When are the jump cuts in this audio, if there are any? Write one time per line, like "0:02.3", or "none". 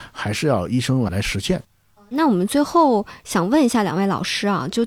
none